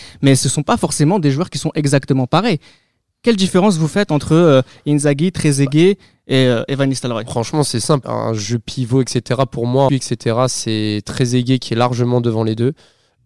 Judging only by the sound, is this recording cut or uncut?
cut